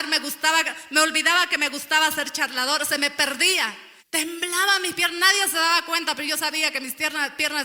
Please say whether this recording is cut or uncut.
cut